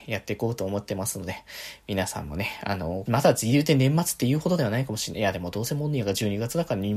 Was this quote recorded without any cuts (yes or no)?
no